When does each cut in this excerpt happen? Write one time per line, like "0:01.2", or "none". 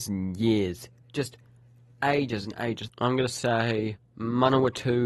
0:02.9